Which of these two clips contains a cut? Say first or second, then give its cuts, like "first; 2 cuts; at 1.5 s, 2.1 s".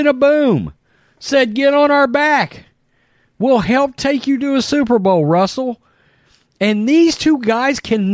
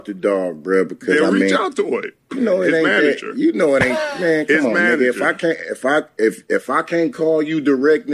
second; 1 cut; at 2.2 s